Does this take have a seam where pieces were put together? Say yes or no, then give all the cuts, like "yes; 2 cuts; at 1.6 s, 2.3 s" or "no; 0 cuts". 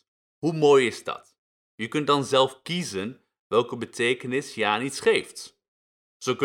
no; 0 cuts